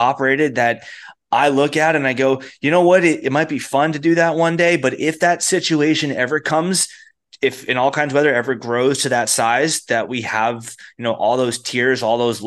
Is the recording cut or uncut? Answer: cut